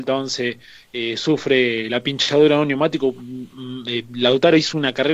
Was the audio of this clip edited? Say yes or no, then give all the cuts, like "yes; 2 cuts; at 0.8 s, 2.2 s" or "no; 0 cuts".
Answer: no; 0 cuts